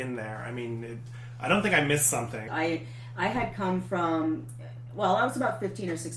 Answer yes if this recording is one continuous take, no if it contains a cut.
no